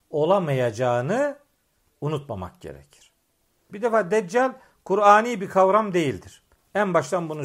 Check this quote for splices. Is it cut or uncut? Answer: cut